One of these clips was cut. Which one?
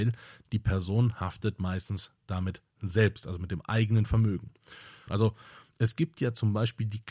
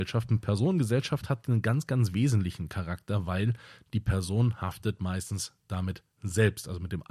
first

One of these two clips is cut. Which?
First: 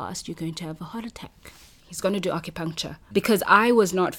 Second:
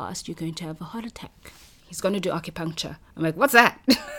first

